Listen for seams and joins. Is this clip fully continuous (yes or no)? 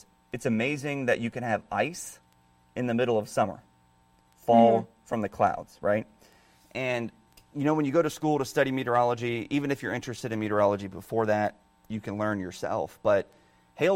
yes